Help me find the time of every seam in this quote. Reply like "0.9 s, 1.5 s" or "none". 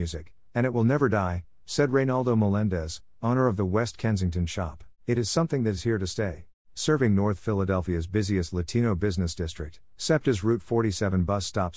5.0 s, 6.6 s